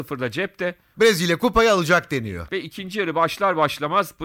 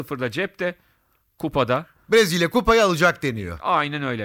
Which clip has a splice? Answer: first; 2 cuts; at 0.9 s, 2.5 s

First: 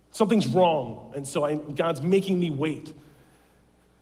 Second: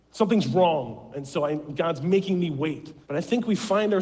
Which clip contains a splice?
second; 1 cut; at 3.0 s

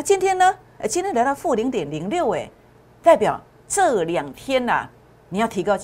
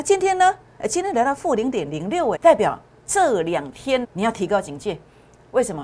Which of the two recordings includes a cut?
second; 2 cuts; at 2.4 s, 4.0 s

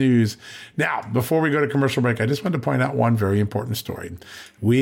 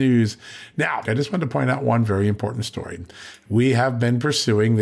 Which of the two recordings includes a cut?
second; 1 cut; at 1.1 s

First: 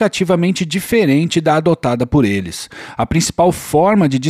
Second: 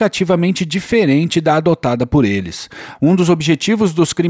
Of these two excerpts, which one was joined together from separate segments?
second; 1 cut; at 3.0 s

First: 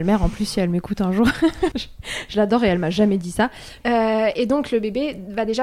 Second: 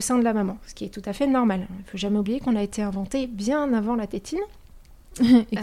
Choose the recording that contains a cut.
first; 2 cuts; at 1.7 s, 3.8 s

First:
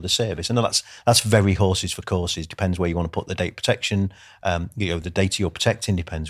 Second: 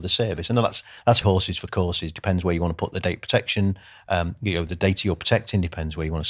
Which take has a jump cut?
second; 1 cut; at 1.2 s

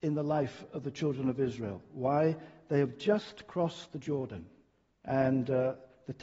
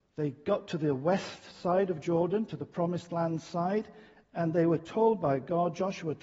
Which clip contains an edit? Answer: first; 1 cut; at 4.9 s

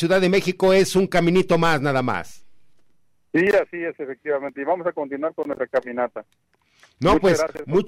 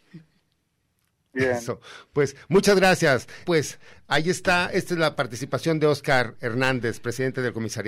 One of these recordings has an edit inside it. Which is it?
second; 1 cut; at 3.5 s

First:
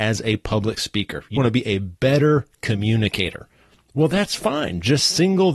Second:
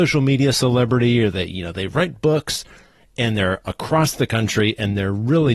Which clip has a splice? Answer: first; 1 cut; at 1.3 s

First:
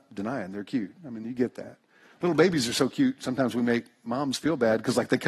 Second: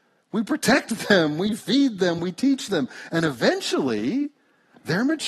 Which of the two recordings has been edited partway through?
second; 1 cut; at 2.2 s

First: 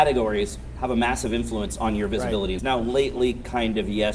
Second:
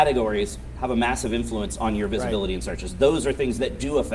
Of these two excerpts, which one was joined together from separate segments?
first; 1 cut; at 2.6 s

